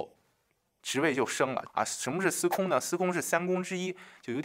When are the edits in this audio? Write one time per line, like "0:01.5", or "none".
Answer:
0:01.7